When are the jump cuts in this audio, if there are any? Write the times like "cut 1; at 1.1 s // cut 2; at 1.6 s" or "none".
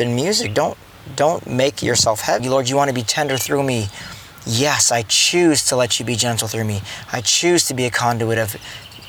cut 1; at 2.4 s